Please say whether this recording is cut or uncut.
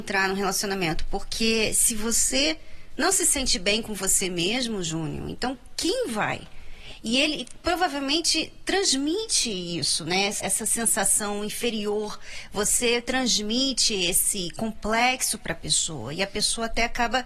uncut